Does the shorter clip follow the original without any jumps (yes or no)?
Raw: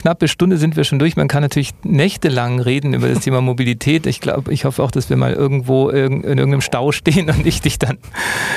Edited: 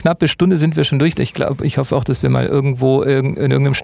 no